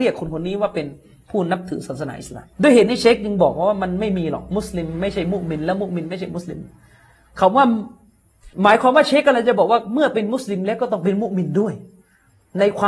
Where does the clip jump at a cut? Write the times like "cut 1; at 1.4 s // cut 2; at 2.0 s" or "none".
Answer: cut 1; at 2.5 s // cut 2; at 8.5 s